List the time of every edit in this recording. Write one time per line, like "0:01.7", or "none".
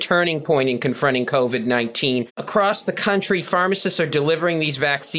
0:02.3